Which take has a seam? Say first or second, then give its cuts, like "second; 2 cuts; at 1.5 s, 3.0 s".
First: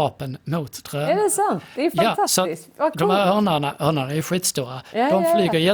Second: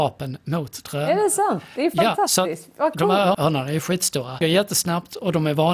second; 2 cuts; at 3.3 s, 4.4 s